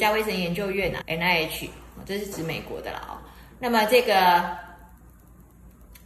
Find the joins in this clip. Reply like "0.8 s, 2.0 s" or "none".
1.0 s